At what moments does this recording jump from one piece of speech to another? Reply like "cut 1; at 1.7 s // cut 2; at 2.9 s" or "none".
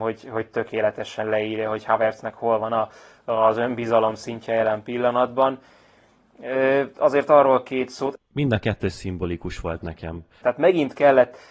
cut 1; at 8.2 s // cut 2; at 10.4 s